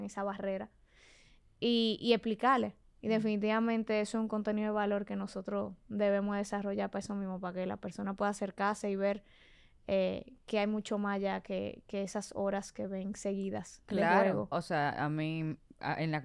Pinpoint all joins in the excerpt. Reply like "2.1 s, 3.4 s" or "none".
14.5 s